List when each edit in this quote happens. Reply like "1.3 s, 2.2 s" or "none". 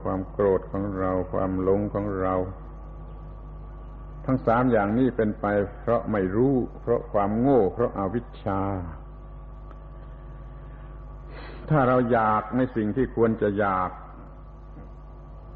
none